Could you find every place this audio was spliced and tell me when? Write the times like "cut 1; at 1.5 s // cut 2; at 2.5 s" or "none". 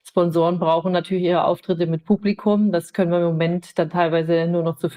none